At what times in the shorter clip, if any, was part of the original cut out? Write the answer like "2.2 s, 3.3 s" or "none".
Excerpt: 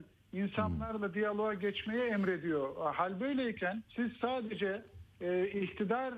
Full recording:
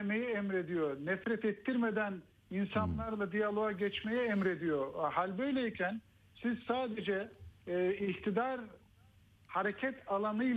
3.9 s